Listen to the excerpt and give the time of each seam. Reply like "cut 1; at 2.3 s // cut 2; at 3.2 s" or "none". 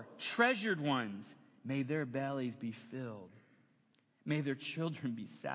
none